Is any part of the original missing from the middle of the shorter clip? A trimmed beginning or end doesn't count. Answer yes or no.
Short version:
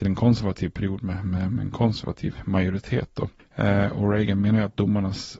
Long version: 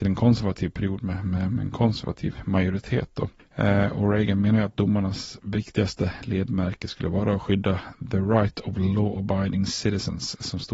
no